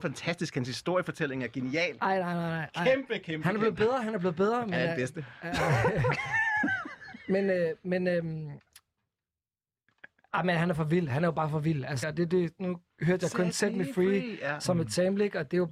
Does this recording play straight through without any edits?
no; 1 cut; at 12.0 s

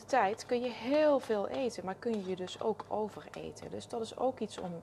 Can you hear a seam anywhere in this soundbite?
no; 0 cuts

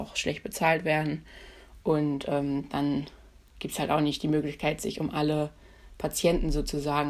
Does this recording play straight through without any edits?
yes; 0 cuts

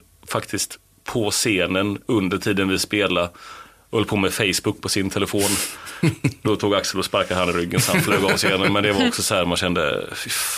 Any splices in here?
no; 0 cuts

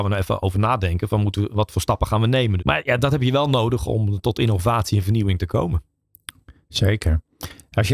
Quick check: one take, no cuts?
no; 1 cut; at 2.6 s

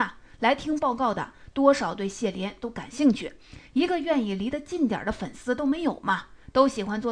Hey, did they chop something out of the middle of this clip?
no; 0 cuts

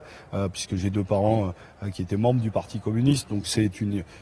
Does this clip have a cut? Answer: no; 0 cuts

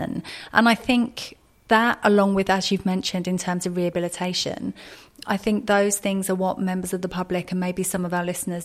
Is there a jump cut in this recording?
no; 0 cuts

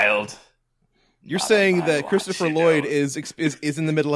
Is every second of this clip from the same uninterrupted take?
yes; 0 cuts

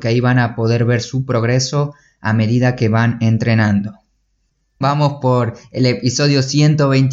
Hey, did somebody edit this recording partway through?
yes; 1 cut; at 4.8 s

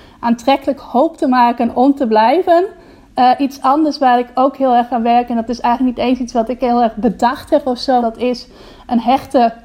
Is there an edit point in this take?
yes; 1 cut; at 8.0 s

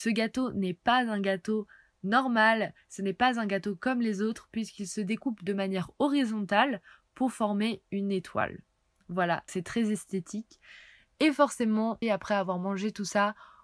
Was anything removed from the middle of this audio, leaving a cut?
yes; 2 cuts; at 9.5 s, 12.0 s

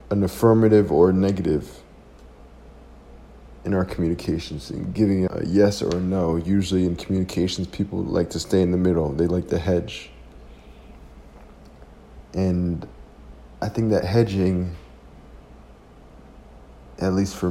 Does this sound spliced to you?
yes; 1 cut; at 5.3 s

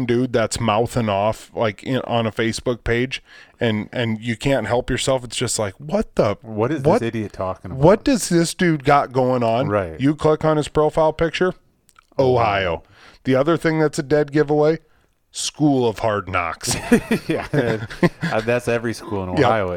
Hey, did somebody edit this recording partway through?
no; 0 cuts

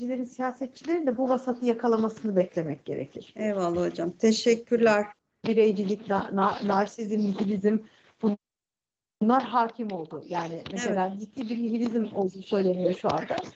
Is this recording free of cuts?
no; 1 cut; at 5.4 s

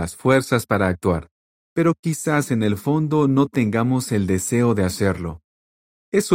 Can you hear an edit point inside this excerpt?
yes; 1 cut; at 1.6 s

